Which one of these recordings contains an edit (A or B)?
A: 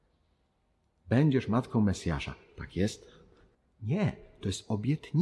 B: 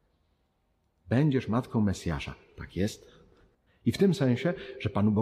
B